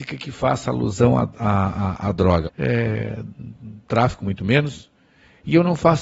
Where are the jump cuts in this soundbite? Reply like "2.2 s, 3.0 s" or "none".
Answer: 2.4 s, 3.8 s